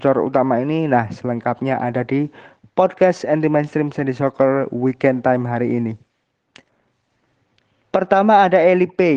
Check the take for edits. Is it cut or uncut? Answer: uncut